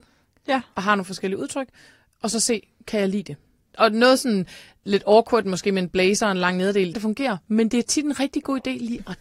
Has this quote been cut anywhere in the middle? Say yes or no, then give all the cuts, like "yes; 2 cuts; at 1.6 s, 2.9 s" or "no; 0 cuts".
yes; 1 cut; at 6.9 s